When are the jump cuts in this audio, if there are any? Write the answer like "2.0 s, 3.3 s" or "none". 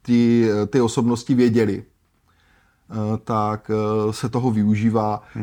none

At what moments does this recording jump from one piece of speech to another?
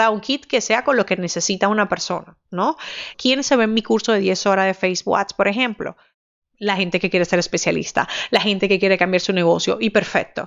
3.1 s

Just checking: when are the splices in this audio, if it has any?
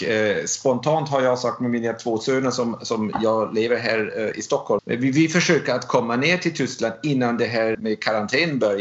4.8 s, 7.7 s

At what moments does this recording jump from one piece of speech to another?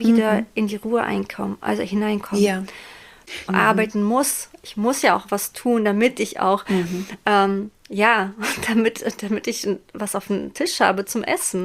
3.5 s

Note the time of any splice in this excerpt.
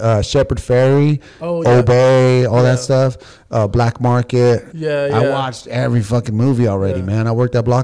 1.6 s, 4.7 s

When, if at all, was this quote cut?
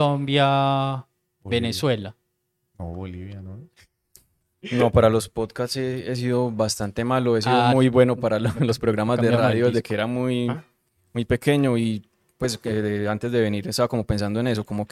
4.5 s

